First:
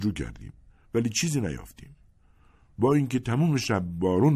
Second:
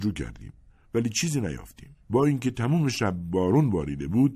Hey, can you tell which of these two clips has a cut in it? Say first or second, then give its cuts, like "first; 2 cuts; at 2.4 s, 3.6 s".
second; 1 cut; at 2.0 s